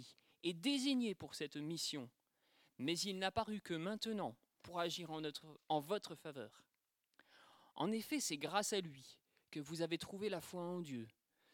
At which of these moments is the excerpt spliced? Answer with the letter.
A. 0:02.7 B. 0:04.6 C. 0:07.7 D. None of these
B